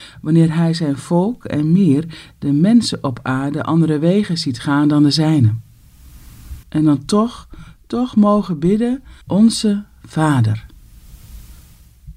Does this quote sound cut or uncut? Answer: cut